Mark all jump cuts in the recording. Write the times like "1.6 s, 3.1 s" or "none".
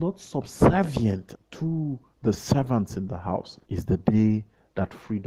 1.3 s, 3.6 s